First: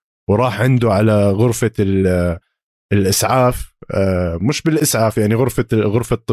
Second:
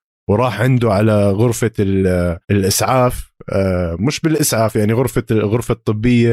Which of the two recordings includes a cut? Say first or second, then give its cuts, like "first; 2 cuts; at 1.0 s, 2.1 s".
second; 1 cut; at 2.4 s